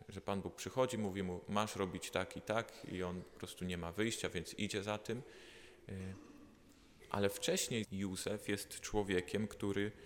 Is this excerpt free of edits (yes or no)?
no